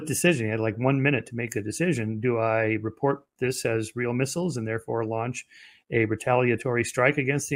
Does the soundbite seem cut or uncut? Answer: uncut